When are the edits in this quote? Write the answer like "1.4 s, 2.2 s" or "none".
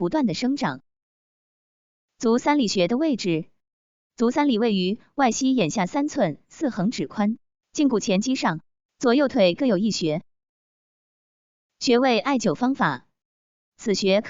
none